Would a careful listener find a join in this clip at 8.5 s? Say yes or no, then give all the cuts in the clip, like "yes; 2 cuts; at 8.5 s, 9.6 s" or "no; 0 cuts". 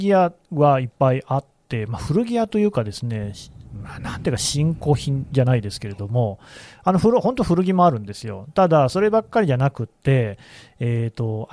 no; 0 cuts